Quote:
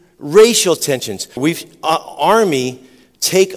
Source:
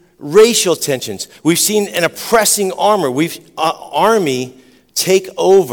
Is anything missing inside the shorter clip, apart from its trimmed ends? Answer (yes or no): yes